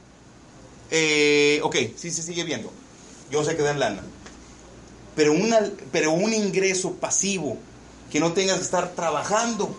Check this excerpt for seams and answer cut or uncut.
cut